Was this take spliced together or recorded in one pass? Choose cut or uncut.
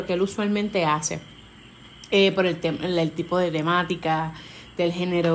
uncut